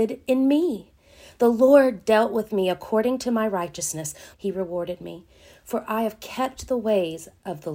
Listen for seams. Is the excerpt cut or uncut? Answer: cut